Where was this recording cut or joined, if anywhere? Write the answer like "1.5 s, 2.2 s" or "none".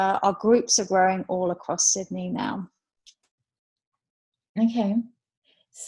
none